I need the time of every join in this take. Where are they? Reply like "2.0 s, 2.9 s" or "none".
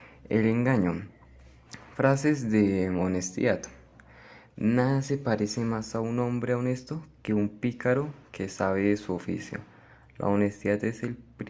none